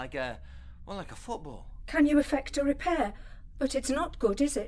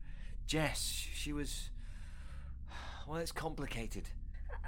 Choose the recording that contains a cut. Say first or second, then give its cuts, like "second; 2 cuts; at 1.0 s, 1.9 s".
first; 1 cut; at 3.5 s